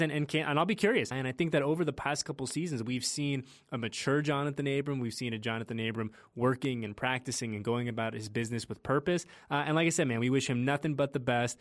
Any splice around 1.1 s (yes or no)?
yes